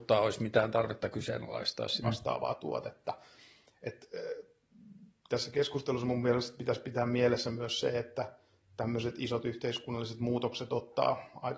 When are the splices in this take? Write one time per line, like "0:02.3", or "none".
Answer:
0:02.0